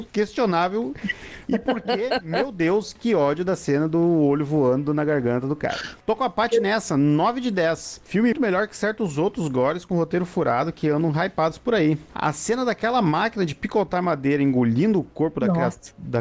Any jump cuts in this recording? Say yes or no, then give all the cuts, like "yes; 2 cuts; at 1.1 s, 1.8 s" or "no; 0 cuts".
yes; 2 cuts; at 8.3 s, 12.1 s